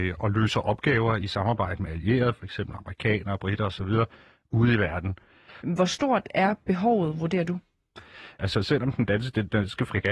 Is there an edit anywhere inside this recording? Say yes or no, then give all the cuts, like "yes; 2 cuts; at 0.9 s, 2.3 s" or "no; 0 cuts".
yes; 2 cuts; at 5.6 s, 8.4 s